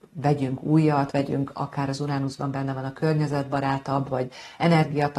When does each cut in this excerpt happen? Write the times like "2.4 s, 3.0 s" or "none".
1.1 s